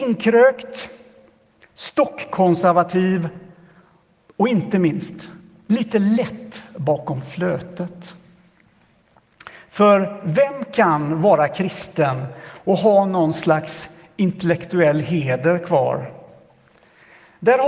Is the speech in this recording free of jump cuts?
yes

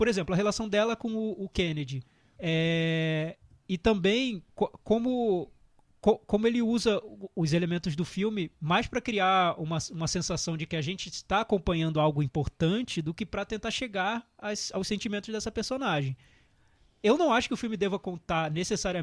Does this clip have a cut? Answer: yes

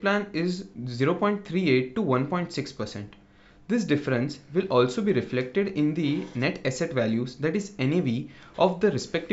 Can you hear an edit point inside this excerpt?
no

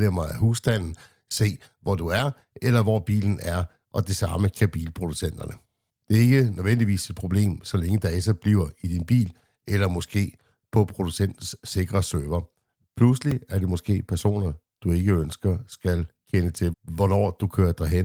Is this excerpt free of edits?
no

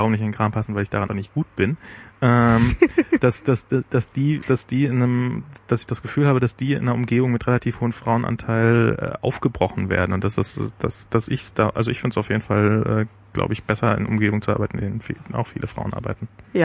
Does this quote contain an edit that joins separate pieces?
yes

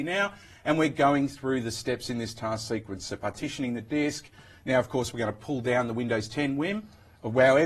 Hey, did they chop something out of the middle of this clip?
no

